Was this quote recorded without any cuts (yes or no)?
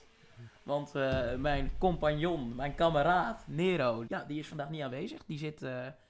no